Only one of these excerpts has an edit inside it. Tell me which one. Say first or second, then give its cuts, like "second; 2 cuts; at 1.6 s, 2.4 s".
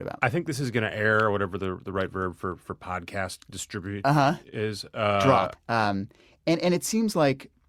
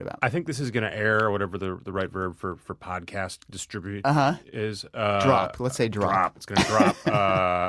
first; 1 cut; at 5.5 s